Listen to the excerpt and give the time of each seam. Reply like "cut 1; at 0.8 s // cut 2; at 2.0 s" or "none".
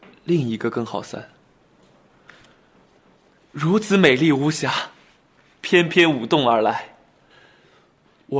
none